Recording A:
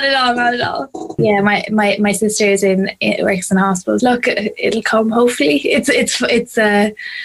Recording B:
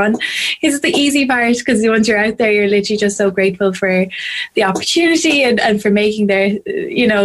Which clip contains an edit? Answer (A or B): A